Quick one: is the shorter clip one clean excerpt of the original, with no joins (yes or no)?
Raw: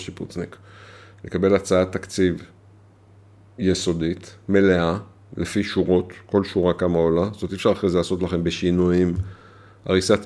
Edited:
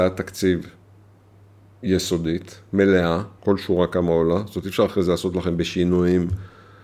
no